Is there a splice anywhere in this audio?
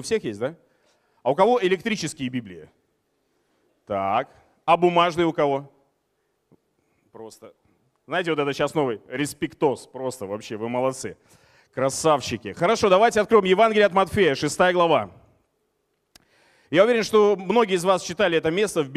no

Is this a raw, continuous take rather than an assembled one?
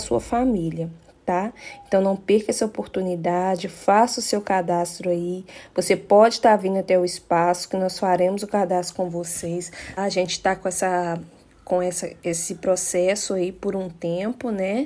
no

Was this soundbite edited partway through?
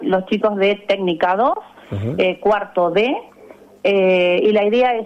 no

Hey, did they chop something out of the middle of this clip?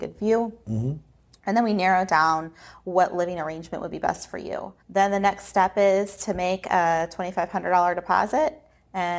yes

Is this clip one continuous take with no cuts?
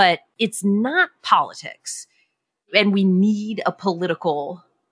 yes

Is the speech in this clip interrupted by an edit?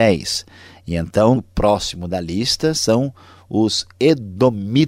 yes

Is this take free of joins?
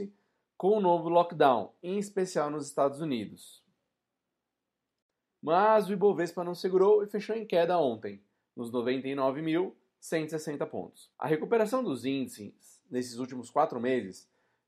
no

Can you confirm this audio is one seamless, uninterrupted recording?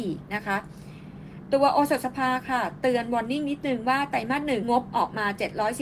no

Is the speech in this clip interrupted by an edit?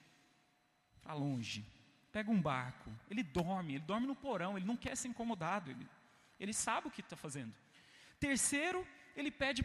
no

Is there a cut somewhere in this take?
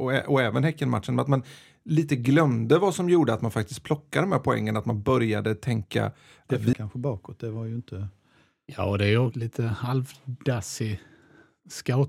yes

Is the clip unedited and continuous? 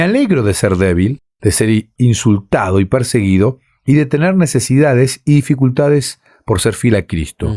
yes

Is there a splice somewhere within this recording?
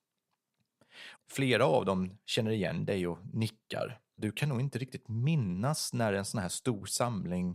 yes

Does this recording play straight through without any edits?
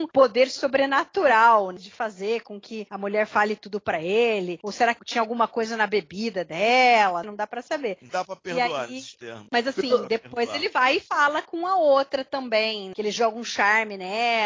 no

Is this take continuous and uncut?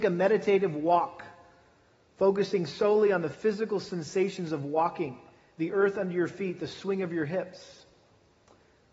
yes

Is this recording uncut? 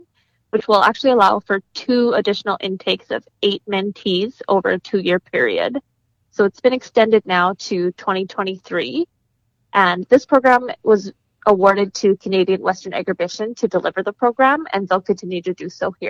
yes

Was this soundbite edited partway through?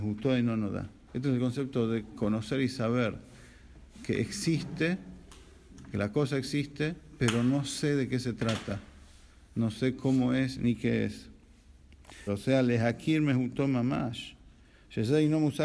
yes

